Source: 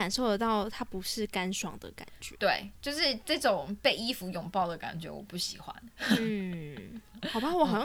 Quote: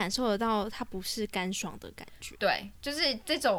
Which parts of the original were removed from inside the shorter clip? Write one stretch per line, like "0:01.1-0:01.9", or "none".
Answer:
none